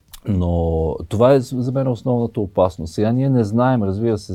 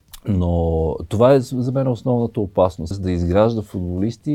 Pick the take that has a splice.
second; 1 cut; at 2.9 s

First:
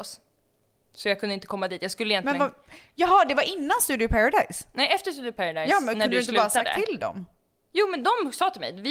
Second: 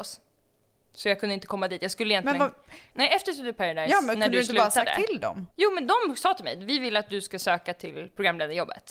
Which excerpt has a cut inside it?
second; 2 cuts; at 2.9 s, 5.5 s

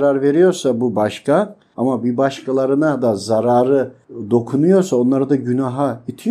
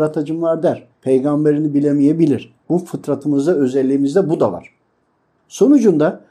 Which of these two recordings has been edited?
second; 2 cuts; at 0.9 s, 2.6 s

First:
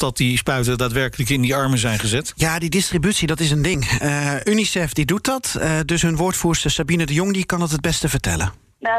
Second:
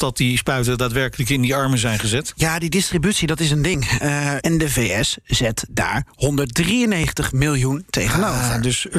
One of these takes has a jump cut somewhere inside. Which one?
second; 1 cut; at 4.4 s

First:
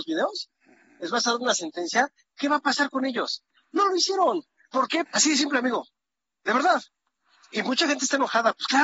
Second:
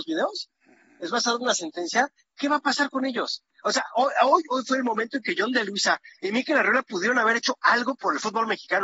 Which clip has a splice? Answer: first; 2 cuts; at 3.6 s, 5.1 s

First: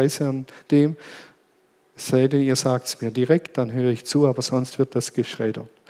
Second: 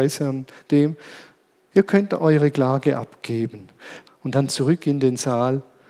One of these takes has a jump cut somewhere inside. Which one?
second; 2 cuts; at 1.7 s, 4.1 s

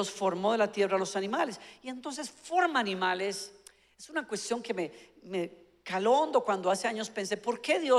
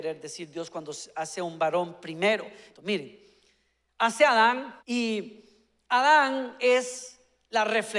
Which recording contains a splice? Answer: second; 2 cuts; at 2.7 s, 4.8 s

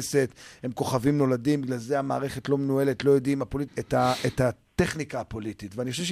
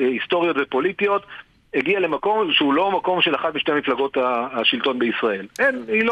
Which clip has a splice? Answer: first; 1 cut; at 3.7 s

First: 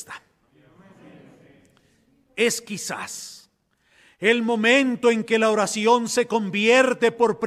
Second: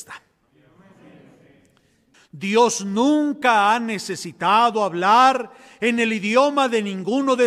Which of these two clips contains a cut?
second; 1 cut; at 2.1 s

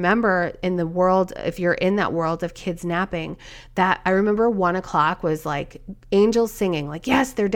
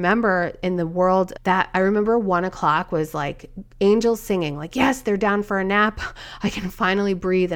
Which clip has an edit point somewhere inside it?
second; 1 cut; at 1.4 s

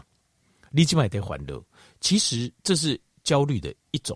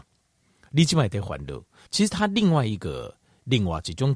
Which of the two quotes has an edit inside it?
second; 1 cut; at 1.9 s

